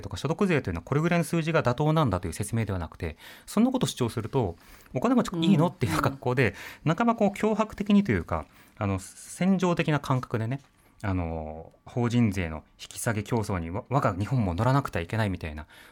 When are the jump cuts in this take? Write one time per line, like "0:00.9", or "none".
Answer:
0:05.3